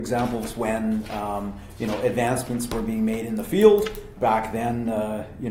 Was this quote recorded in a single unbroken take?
no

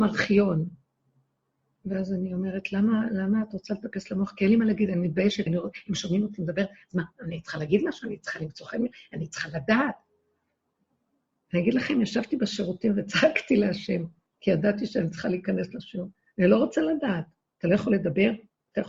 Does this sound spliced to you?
yes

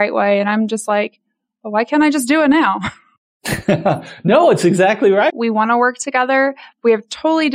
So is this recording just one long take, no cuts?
no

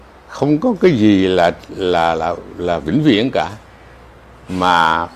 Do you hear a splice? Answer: no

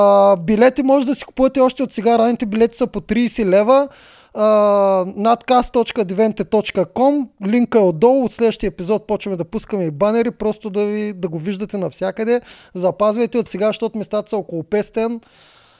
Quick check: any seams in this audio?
no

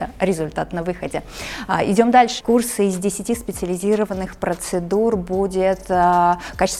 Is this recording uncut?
no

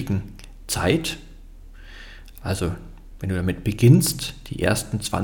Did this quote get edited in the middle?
no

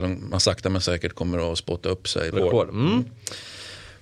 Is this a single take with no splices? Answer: no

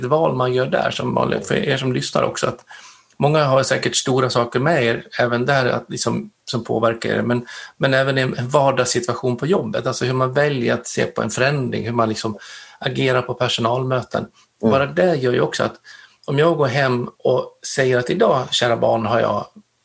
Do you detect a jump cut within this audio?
no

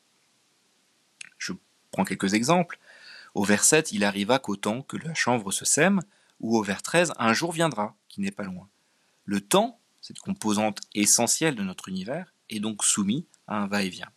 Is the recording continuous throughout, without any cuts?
yes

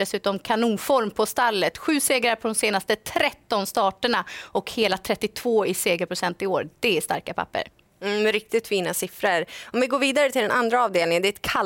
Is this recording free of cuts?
yes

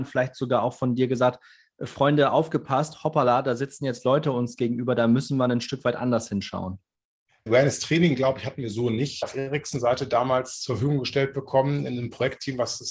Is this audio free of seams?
no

